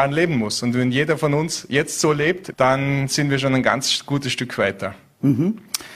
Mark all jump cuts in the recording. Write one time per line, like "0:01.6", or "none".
0:02.5